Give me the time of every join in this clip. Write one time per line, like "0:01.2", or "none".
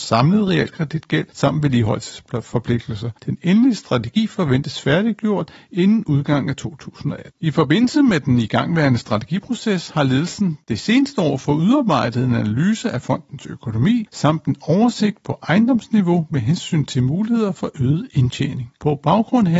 0:07.4

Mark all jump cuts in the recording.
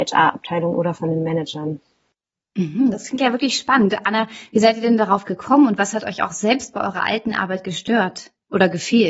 none

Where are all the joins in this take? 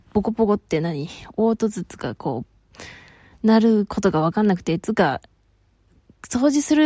none

